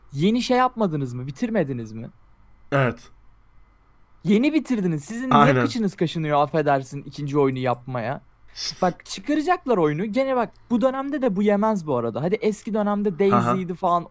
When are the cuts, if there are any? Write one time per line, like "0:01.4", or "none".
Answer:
none